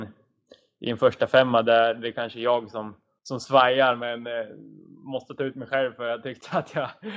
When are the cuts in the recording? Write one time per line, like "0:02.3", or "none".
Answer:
none